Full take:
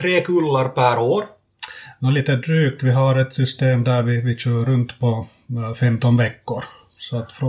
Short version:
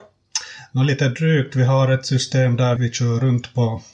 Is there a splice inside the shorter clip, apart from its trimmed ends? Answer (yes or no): yes